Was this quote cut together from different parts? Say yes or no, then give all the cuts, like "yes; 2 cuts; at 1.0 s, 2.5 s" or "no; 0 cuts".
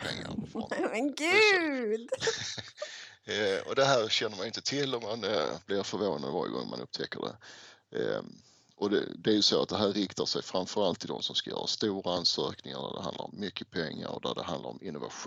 no; 0 cuts